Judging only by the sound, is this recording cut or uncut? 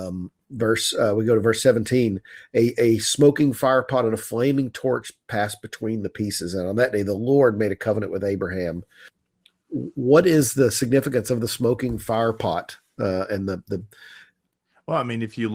uncut